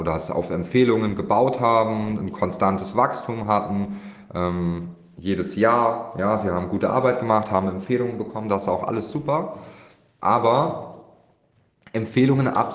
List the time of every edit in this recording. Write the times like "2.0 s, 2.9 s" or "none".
none